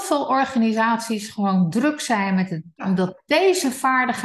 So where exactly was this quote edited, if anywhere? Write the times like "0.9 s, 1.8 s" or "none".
2.8 s